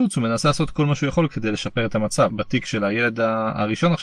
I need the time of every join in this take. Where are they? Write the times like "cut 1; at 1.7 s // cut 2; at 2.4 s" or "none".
cut 1; at 2.3 s